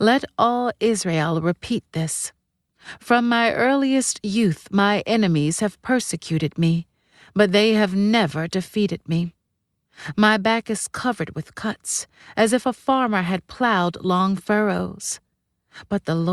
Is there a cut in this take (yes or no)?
no